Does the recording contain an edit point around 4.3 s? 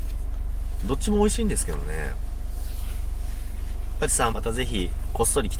yes; 1 cut; at 4.3 s

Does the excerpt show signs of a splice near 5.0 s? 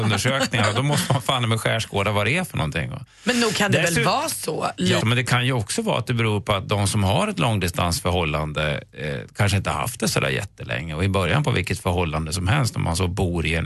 yes; 1 cut; at 5.0 s

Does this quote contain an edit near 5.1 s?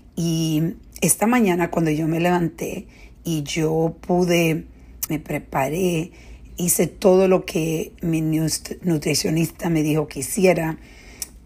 yes; 2 cuts; at 5.1 s, 6.5 s

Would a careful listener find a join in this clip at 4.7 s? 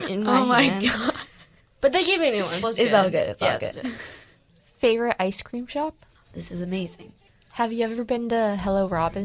no; 2 cuts; at 2.6 s, 6.3 s

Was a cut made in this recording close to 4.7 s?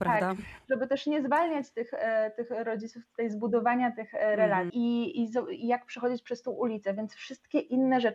yes; 1 cut; at 4.7 s

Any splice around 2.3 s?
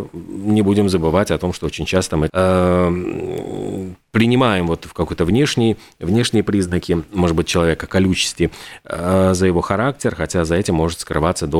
yes; 1 cut; at 2.3 s

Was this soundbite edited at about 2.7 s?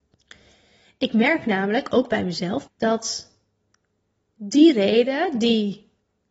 yes; 1 cut; at 2.7 s

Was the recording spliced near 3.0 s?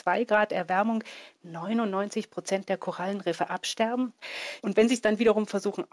no; 1 cut; at 4.6 s

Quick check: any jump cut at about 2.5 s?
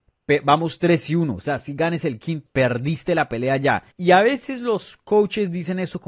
yes; 2 cuts; at 2.5 s, 3.9 s

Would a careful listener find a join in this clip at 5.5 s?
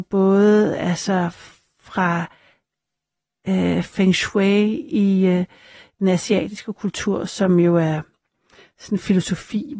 no; 0 cuts

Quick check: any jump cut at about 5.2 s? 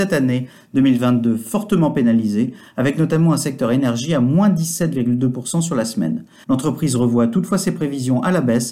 no; 1 cut; at 6.4 s

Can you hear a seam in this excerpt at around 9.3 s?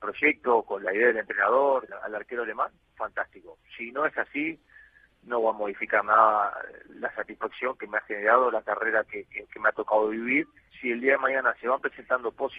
no; 2 cuts; at 1.9 s, 10.6 s

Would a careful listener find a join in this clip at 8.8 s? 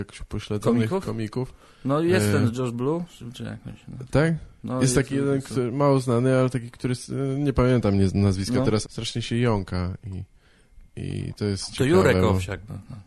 yes; 1 cut; at 8.8 s

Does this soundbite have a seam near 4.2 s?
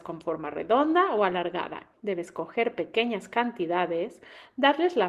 no; 1 cut; at 1.9 s

